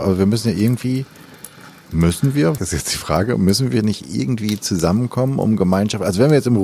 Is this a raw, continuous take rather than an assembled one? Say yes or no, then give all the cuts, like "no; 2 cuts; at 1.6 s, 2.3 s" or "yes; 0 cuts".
no; 1 cut; at 2.6 s